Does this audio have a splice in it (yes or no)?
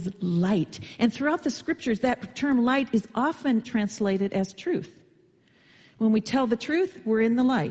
yes